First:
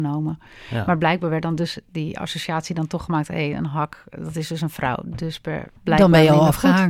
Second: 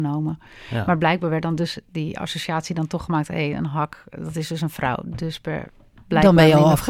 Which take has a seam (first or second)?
first